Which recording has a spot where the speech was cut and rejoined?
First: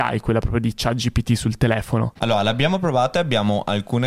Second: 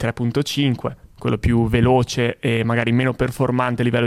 first; 1 cut; at 2.2 s

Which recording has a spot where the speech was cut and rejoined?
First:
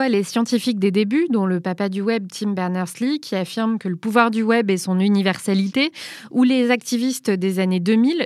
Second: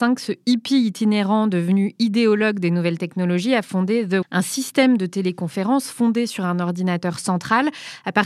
second; 1 cut; at 4.2 s

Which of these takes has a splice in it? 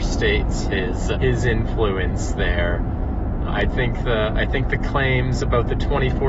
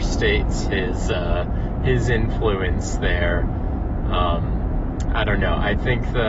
first; 2 cuts; at 1.1 s, 3.5 s

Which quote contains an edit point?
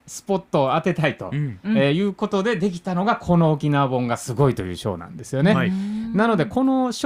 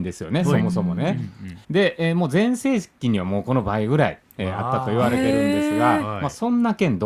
second; 1 cut; at 1.6 s

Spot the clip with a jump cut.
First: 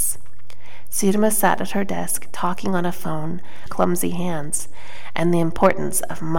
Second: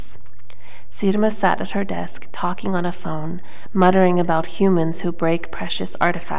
first; 1 cut; at 3.7 s

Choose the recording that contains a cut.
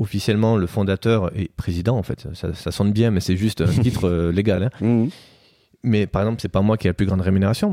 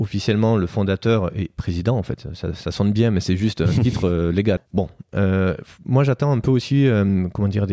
second; 1 cut; at 4.6 s

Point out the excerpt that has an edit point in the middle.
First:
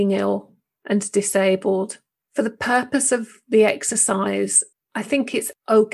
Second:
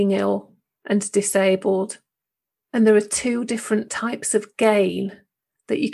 first; 1 cut; at 2.3 s

